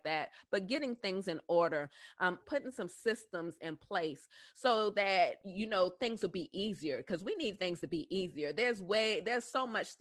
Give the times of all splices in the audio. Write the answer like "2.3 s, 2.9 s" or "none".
2.4 s